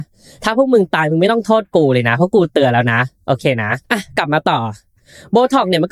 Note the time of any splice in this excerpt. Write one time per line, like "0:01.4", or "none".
0:03.8